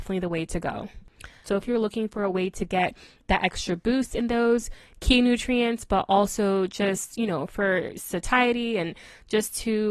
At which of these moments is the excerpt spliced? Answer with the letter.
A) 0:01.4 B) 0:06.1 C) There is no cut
A